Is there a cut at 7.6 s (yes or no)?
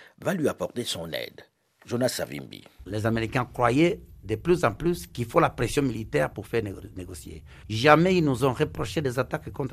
yes